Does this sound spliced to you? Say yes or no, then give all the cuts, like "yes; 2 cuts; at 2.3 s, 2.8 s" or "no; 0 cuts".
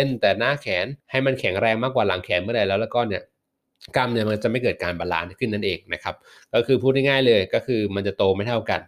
yes; 1 cut; at 1.0 s